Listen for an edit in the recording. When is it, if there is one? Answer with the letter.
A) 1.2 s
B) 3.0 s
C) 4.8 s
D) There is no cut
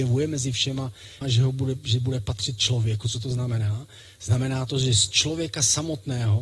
A